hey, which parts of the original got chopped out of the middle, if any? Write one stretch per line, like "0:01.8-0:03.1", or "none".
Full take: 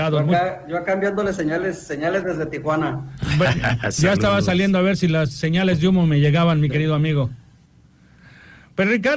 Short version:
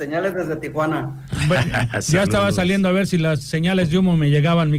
none